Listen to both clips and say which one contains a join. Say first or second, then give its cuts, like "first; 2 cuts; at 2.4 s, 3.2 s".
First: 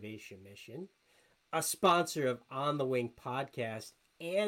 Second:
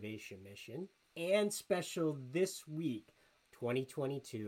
second; 2 cuts; at 1.0 s, 3.4 s